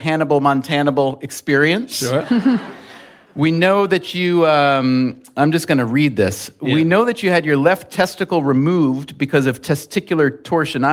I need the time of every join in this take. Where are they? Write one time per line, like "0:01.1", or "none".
none